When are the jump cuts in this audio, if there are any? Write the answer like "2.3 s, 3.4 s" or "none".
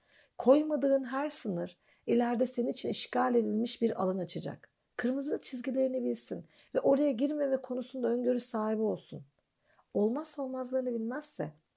none